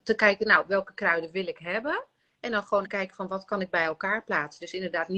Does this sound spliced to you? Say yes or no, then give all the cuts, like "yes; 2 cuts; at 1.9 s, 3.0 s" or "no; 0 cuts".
yes; 1 cut; at 2.8 s